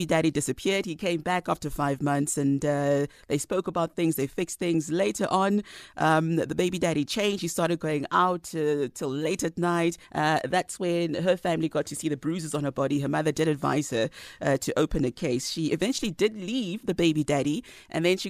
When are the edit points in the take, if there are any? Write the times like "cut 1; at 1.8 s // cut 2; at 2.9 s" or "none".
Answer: cut 1; at 10.0 s